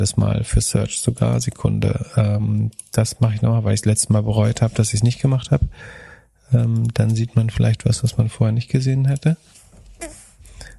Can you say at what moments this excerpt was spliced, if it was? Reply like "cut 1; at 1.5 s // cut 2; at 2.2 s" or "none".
none